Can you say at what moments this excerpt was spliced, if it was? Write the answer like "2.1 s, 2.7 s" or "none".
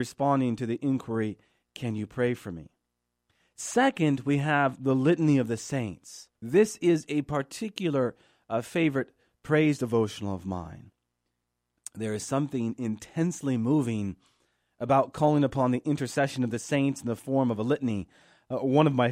6.4 s